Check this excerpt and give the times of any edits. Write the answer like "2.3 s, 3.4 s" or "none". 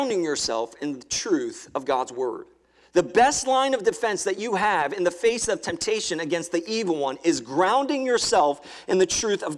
none